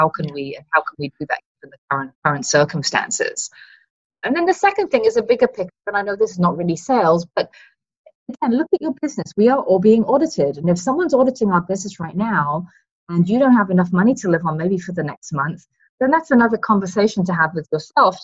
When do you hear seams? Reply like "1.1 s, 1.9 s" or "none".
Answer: 2.2 s